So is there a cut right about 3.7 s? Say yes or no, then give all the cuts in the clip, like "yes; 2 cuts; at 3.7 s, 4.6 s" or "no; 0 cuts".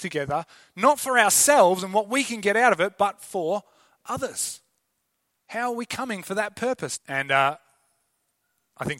no; 2 cuts; at 5.3 s, 7.0 s